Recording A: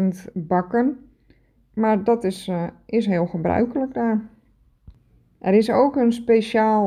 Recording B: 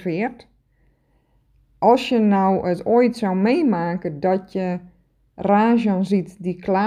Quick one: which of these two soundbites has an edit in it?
A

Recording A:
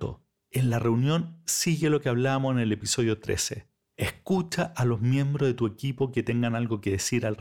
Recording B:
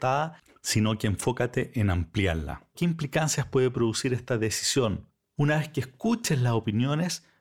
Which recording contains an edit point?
B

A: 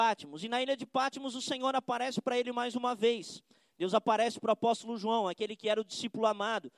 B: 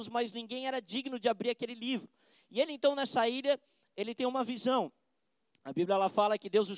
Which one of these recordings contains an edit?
B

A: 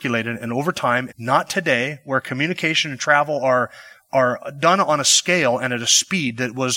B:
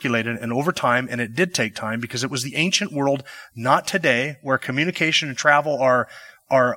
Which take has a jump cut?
A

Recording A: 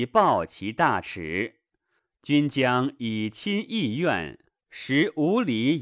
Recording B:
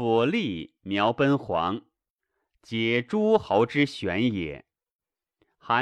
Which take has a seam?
A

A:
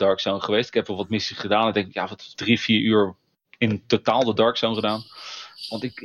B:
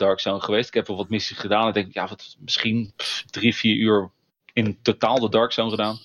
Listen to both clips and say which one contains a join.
A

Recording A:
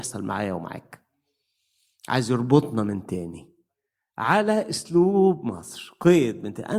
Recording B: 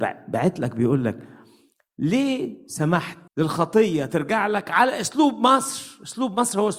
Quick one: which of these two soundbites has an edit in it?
B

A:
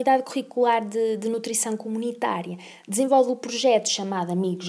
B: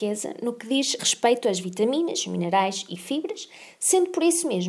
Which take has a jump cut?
B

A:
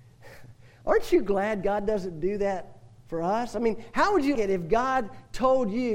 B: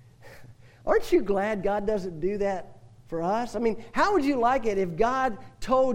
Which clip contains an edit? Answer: A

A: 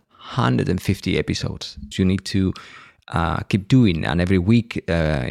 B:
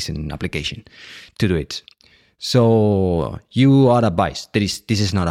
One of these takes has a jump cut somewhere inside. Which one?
A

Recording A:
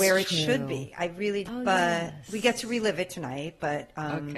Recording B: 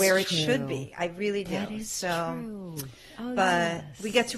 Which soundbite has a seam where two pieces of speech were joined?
A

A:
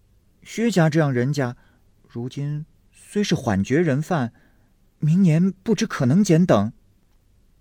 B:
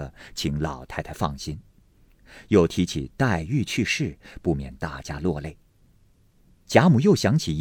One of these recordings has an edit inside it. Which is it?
A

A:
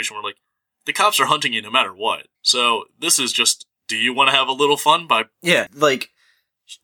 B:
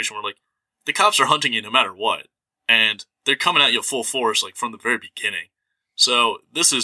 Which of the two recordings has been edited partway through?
A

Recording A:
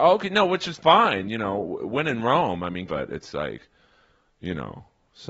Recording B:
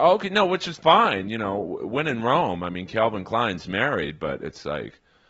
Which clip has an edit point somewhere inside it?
A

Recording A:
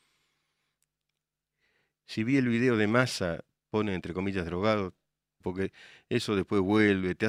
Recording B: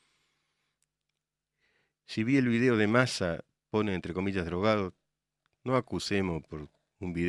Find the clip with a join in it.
A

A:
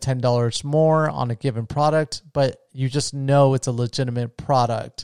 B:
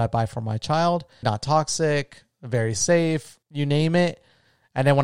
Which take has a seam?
B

